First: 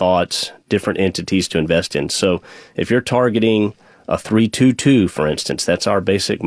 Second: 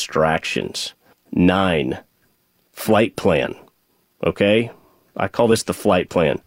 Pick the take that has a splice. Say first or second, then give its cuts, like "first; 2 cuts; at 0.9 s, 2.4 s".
second; 1 cut; at 1.1 s